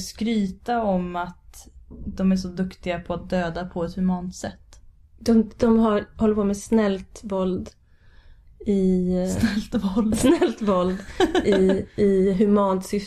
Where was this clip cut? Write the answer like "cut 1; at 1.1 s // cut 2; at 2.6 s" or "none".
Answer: none